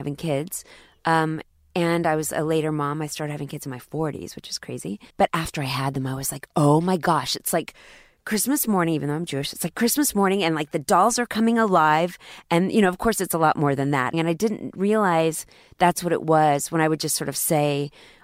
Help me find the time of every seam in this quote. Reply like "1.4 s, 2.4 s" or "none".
5.1 s, 14.1 s